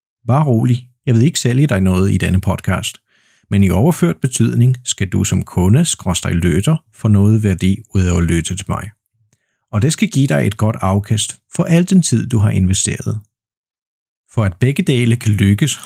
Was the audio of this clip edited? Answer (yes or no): no